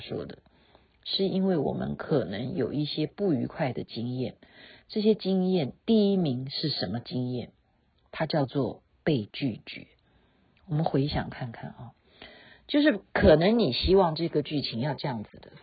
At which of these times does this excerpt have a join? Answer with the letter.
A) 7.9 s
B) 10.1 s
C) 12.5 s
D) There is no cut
D